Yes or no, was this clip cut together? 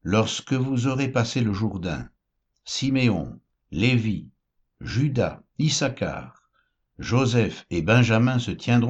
no